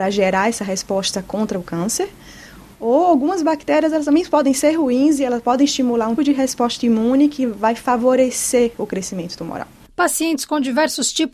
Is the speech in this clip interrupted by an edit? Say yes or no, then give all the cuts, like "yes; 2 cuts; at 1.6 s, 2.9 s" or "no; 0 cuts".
yes; 1 cut; at 6.2 s